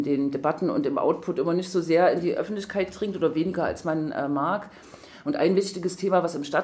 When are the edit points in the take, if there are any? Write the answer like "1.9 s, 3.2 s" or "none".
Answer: none